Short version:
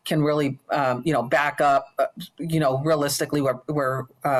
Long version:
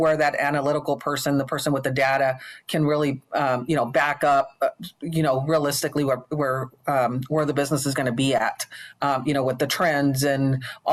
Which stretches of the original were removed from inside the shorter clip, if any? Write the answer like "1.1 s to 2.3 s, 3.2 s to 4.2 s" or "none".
none